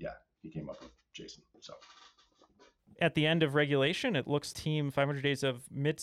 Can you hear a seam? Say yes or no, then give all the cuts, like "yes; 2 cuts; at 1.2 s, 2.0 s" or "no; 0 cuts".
yes; 1 cut; at 4.5 s